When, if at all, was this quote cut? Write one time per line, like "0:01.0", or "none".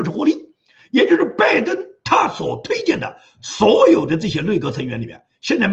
none